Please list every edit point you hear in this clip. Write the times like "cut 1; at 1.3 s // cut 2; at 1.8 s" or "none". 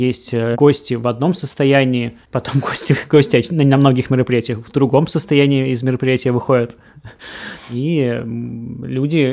none